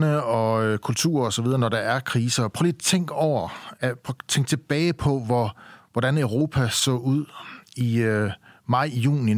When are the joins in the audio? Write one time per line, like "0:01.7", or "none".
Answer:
0:03.7